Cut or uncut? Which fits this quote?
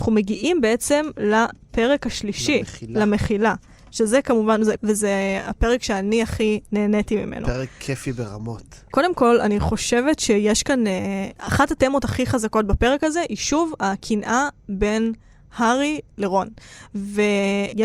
cut